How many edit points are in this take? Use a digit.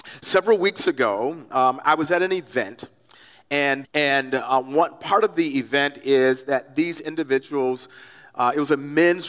1